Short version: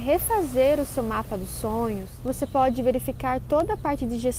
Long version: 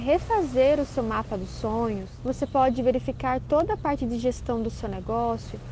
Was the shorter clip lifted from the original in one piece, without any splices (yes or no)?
yes